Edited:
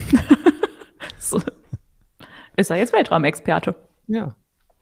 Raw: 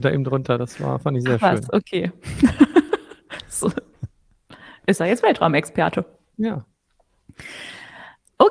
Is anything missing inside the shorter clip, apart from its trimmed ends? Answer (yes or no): no